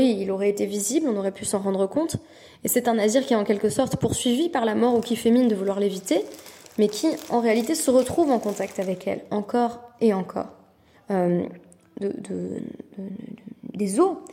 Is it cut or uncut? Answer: cut